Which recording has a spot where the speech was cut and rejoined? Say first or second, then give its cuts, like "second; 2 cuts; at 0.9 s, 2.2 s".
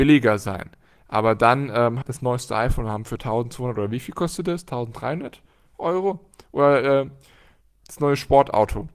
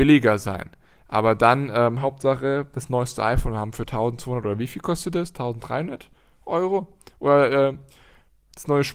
first; 1 cut; at 2.0 s